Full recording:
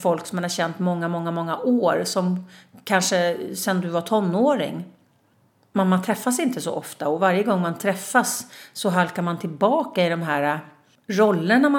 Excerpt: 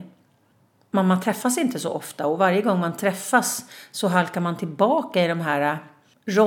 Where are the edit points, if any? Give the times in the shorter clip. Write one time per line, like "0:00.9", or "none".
none